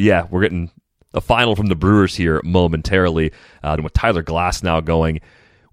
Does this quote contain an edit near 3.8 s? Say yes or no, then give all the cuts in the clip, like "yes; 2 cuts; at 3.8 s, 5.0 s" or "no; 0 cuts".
yes; 1 cut; at 3.8 s